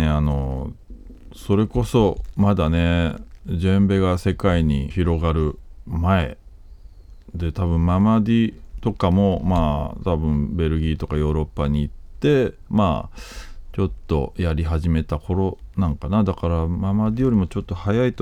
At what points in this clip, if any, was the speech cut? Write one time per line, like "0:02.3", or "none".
0:04.9